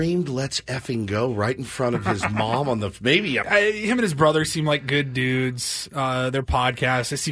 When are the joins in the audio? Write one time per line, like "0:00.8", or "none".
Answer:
0:03.4